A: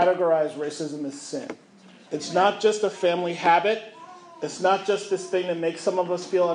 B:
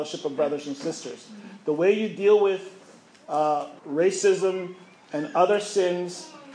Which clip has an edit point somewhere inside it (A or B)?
B